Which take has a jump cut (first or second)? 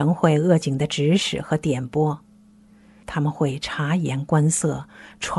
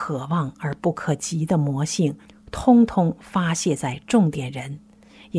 first